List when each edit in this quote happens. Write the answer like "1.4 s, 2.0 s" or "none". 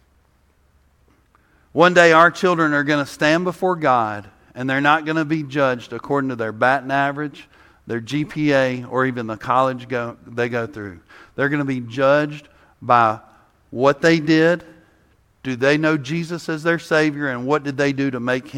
none